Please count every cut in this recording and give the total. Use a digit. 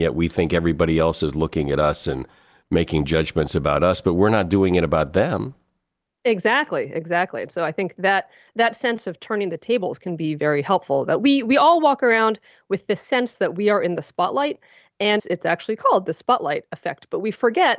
1